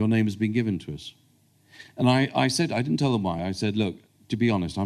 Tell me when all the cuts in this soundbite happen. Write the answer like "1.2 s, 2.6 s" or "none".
none